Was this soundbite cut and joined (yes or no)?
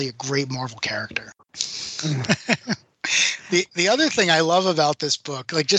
yes